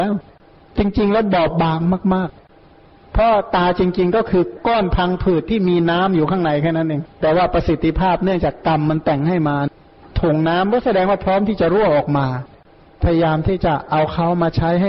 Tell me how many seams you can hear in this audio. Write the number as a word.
one